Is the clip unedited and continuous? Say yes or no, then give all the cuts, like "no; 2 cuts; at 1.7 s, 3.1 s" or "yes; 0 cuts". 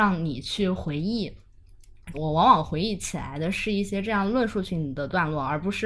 no; 1 cut; at 2.1 s